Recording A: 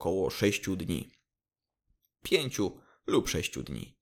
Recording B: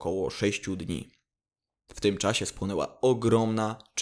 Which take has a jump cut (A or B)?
B